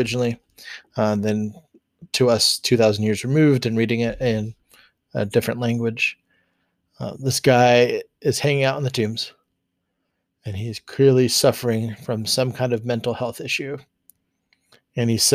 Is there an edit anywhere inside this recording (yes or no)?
no